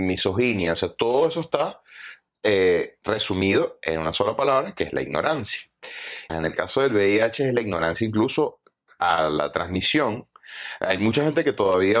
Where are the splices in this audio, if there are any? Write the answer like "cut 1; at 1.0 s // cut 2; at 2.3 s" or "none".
cut 1; at 6.3 s